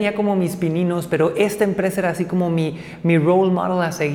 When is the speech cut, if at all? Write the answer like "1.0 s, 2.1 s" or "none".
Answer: none